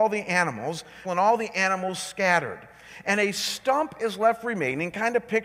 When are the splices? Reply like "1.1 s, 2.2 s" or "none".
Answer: 1.0 s